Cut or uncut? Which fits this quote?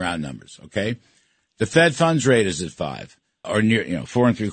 cut